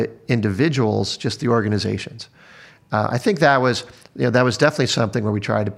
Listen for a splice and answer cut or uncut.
uncut